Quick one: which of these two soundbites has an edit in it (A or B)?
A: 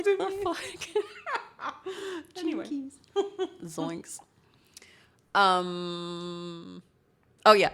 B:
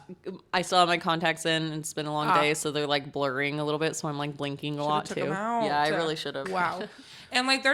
B